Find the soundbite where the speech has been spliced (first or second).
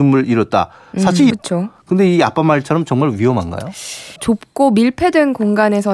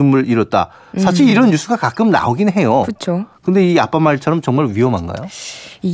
first